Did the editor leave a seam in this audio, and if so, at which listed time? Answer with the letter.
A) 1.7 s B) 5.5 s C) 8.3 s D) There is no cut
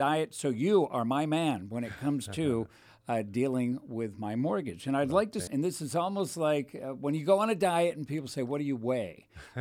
B